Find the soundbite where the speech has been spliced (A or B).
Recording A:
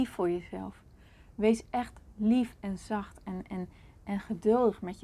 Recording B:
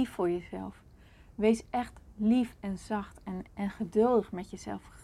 B